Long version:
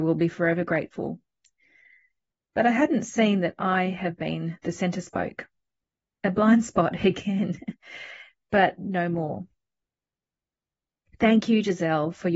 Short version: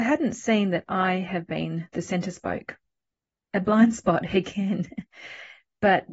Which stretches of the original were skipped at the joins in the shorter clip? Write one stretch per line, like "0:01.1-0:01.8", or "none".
none